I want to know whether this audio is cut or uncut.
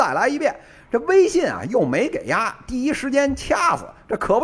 uncut